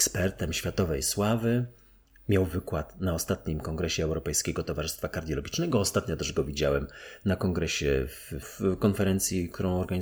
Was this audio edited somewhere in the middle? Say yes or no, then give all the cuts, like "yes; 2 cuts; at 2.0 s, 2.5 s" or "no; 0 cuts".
yes; 1 cut; at 8.4 s